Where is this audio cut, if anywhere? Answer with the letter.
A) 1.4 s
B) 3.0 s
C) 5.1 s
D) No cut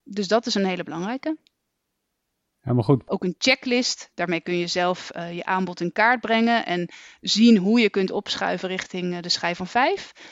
B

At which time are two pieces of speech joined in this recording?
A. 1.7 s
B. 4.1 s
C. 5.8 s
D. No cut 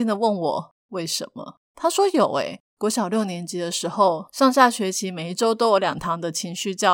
A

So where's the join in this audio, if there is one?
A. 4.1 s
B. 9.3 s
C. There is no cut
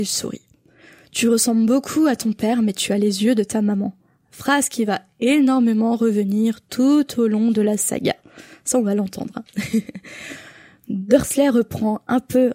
C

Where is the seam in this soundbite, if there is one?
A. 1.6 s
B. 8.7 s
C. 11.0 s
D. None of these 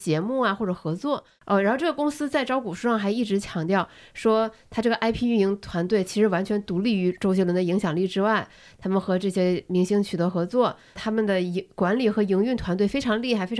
C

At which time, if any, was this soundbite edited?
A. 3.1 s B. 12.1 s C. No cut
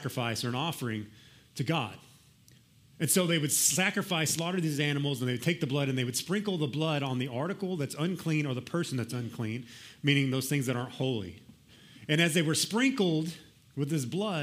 C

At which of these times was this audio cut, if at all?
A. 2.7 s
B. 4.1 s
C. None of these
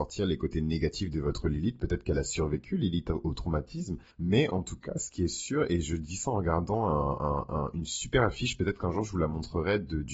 B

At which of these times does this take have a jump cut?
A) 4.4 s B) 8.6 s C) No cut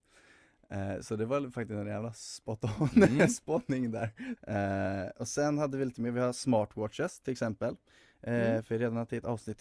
A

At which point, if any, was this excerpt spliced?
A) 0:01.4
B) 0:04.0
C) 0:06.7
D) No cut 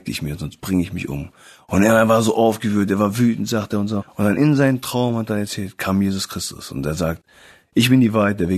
B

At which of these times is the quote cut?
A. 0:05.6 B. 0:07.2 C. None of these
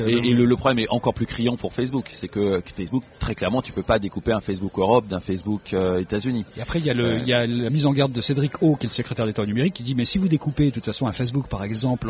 C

